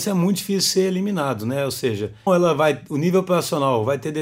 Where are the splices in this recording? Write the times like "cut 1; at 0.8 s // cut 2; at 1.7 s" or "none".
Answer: cut 1; at 2.3 s